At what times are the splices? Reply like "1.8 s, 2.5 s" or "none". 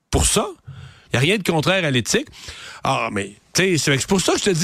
1.1 s

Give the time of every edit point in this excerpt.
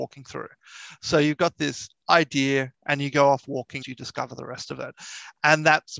2.7 s, 3.8 s

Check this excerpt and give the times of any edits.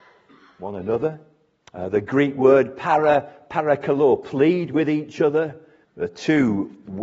1.6 s, 5.8 s

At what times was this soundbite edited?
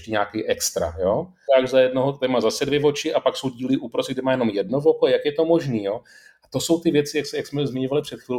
1.5 s

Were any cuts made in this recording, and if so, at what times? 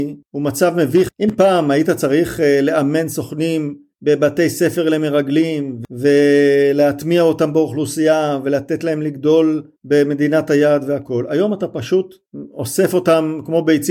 none

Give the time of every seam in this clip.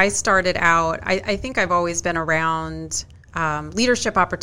3.2 s

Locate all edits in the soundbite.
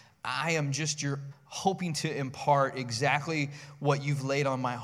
1.3 s

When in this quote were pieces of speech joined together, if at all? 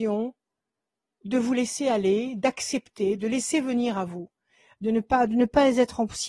none

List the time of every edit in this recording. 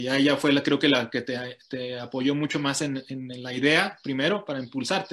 none

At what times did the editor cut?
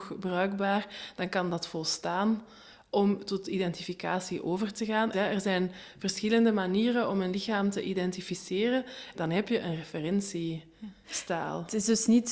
5.1 s, 9.1 s

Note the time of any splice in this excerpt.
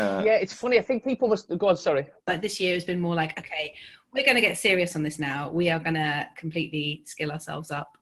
2.3 s

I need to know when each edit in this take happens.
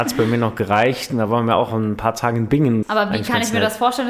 2.8 s

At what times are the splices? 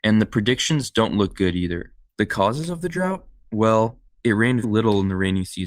2.0 s, 4.6 s

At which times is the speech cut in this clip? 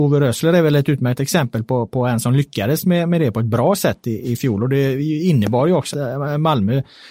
5.9 s

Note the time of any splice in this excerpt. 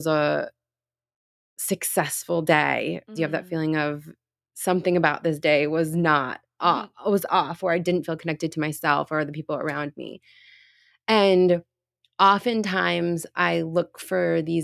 3.2 s, 6.9 s

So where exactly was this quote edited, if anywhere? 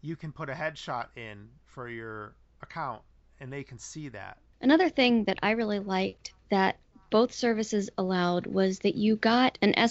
none

